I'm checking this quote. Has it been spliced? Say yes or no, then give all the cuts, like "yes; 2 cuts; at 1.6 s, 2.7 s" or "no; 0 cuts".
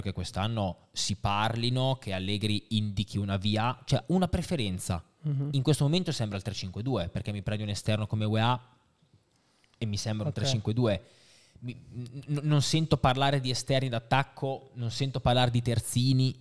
no; 0 cuts